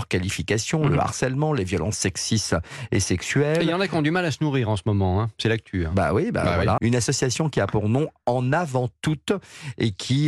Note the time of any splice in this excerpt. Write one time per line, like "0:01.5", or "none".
0:06.8